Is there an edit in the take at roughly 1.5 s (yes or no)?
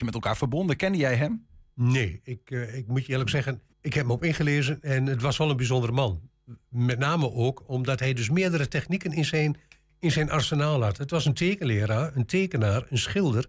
no